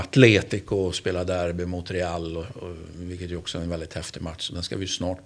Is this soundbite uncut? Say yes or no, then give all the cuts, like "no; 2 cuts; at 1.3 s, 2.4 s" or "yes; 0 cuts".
yes; 0 cuts